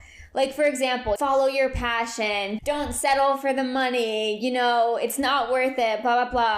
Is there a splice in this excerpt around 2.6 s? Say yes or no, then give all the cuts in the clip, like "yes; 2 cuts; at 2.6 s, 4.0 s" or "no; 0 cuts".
yes; 2 cuts; at 1.2 s, 2.6 s